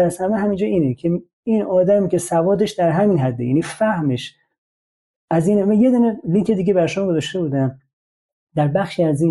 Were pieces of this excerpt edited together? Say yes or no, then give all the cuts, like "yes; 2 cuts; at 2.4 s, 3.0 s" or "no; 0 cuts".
no; 0 cuts